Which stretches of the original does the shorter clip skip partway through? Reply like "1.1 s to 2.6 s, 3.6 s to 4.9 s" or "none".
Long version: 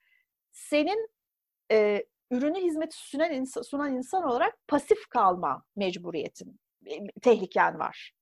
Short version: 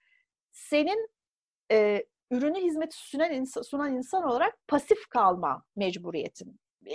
none